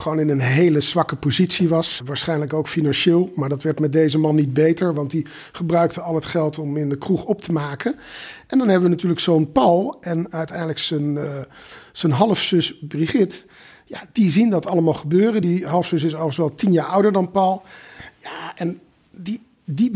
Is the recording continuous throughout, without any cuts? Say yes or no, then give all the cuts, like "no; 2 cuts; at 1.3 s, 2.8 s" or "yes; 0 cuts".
yes; 0 cuts